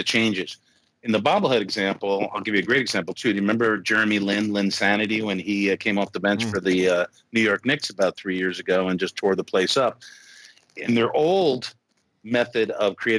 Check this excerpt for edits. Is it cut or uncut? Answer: uncut